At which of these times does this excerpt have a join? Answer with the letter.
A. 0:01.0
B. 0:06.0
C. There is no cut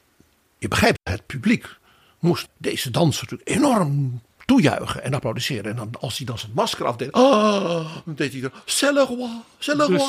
A